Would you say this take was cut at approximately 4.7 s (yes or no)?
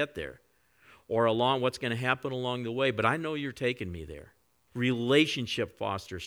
yes